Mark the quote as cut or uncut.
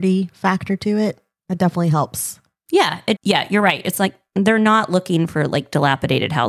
cut